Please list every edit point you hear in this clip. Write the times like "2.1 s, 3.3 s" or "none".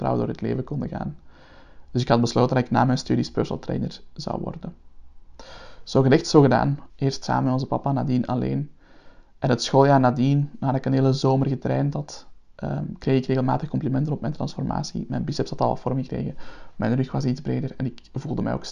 6.9 s